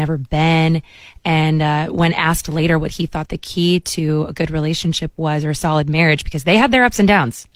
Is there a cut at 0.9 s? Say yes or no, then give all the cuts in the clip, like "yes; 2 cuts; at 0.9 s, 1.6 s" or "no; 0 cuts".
no; 0 cuts